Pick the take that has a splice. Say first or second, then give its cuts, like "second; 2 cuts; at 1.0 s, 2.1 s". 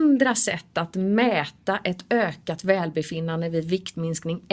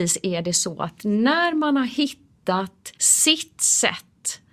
second; 1 cut; at 3.0 s